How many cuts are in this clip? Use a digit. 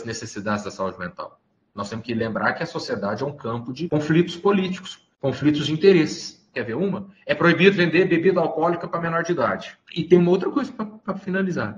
2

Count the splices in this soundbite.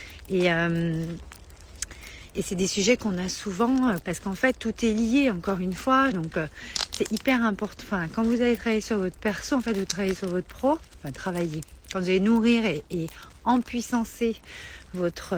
2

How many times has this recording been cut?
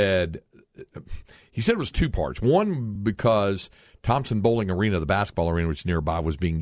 0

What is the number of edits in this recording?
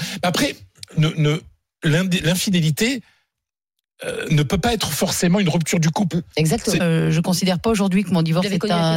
1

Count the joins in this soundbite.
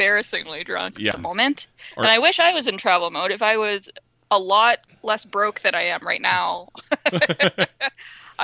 1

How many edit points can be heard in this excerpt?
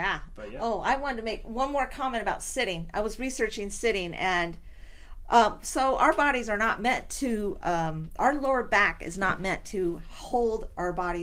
0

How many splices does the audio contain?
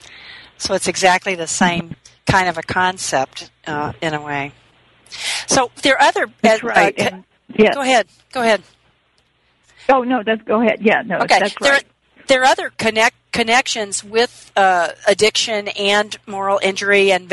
0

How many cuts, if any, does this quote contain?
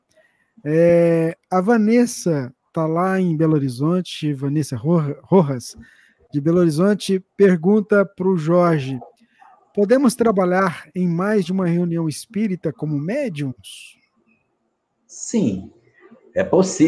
0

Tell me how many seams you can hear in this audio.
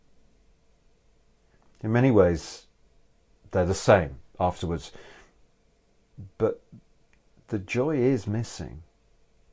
0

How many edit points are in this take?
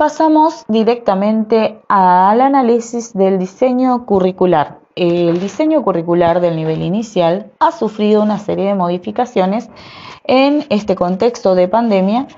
1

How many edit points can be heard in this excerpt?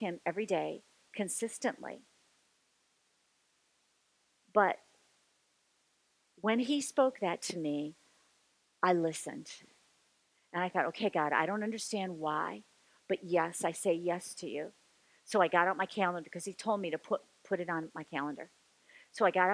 0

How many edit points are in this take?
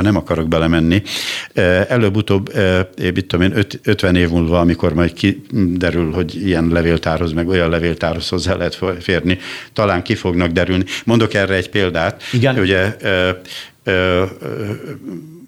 0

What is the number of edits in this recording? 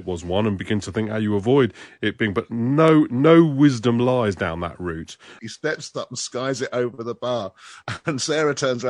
1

